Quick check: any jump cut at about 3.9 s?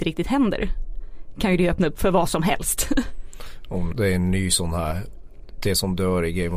yes; 1 cut; at 3.9 s

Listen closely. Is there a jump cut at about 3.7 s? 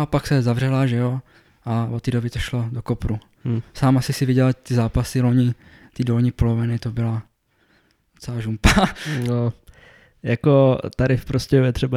no; 0 cuts

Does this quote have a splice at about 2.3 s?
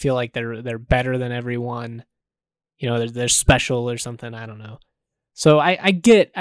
no; 0 cuts

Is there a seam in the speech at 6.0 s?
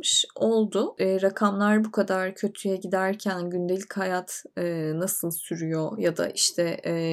no; 1 cut; at 1.0 s

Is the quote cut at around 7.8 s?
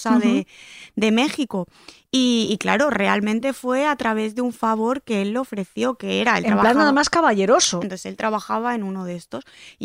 yes; 1 cut; at 7.8 s

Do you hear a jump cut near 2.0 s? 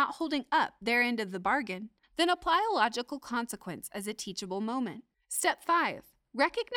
yes; 2 cuts; at 2.0 s, 5.1 s

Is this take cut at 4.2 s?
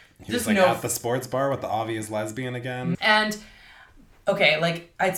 no; 1 cut; at 2.9 s

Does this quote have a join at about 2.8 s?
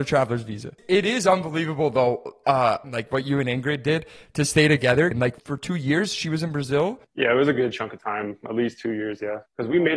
yes; 2 cuts; at 2.8 s, 5.1 s

